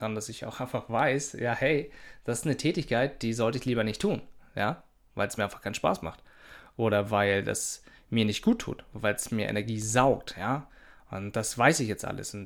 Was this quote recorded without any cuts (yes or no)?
yes